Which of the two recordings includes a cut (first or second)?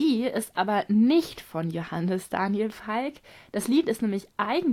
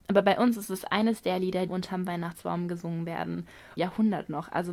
second